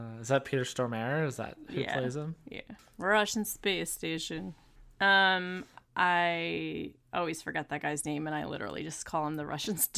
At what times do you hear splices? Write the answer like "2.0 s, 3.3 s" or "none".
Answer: 2.8 s